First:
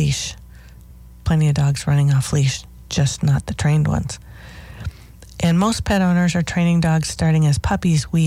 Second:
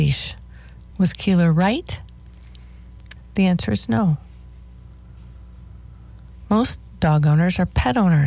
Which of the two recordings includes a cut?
second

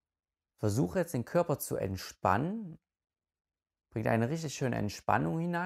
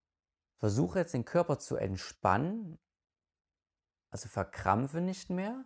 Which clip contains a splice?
first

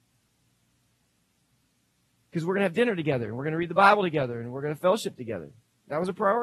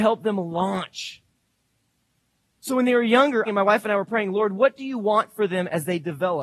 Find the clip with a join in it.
second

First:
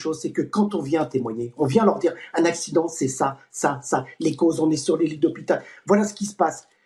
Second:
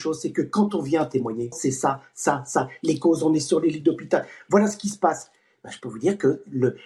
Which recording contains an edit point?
second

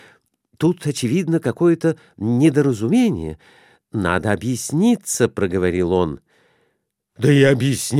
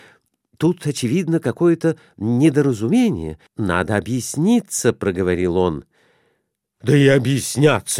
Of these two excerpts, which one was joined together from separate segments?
second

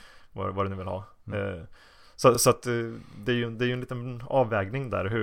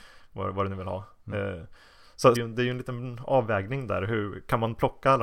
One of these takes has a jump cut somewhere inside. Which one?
second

